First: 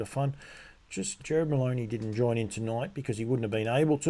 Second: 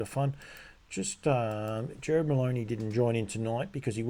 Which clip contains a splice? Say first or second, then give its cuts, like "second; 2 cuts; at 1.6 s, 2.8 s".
first; 1 cut; at 1.2 s